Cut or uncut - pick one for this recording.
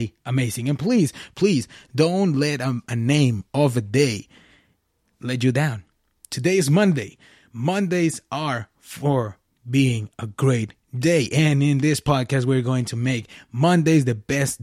uncut